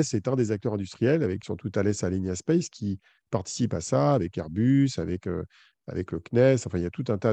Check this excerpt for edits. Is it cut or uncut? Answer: cut